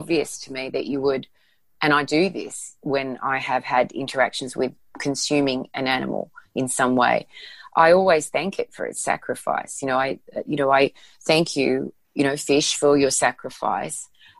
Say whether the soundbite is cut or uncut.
uncut